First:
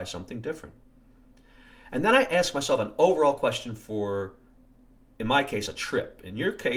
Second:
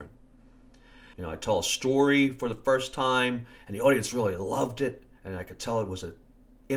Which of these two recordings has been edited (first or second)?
second